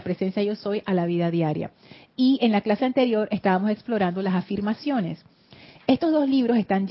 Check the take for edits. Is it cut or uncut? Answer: uncut